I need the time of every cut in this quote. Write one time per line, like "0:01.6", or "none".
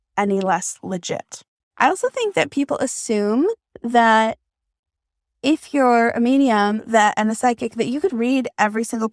0:01.6
0:08.1